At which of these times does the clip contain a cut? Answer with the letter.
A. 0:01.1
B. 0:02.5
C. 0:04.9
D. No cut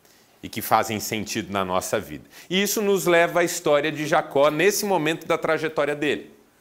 D